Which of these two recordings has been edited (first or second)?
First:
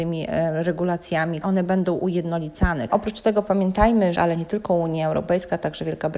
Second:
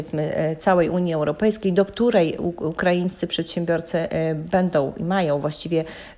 first